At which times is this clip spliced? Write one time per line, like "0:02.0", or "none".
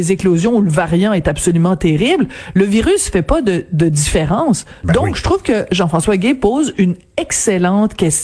none